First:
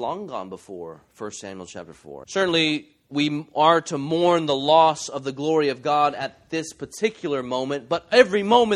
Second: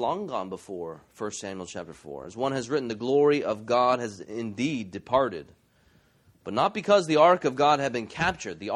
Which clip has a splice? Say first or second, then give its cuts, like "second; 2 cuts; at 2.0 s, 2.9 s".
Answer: first; 1 cut; at 2.2 s